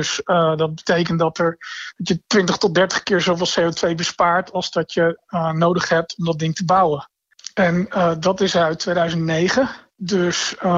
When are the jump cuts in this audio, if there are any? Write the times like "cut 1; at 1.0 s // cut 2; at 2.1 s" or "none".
none